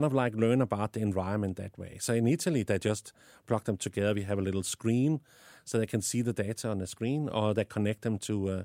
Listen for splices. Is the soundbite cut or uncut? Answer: uncut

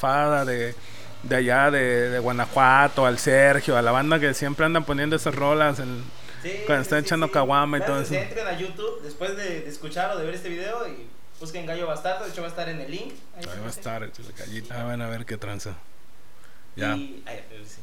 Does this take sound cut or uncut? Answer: cut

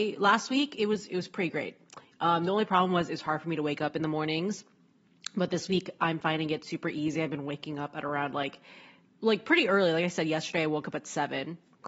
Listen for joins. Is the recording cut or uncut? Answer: uncut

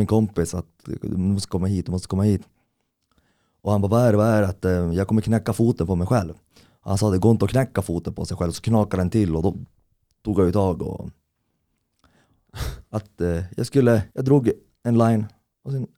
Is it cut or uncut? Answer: cut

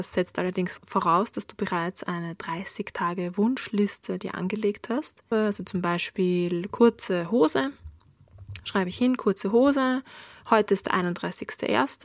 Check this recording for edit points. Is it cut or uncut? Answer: cut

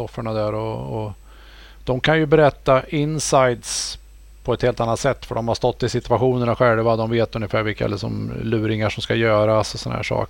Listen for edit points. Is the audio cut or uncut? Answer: uncut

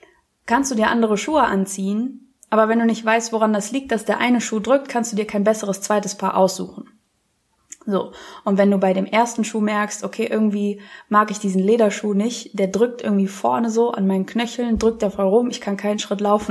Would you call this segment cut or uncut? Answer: uncut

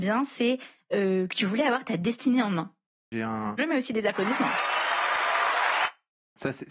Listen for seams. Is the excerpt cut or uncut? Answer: cut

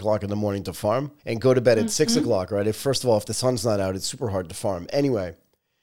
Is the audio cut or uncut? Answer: cut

